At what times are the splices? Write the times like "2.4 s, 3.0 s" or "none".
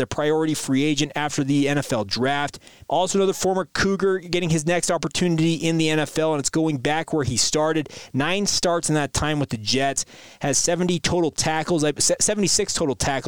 2.9 s, 8.1 s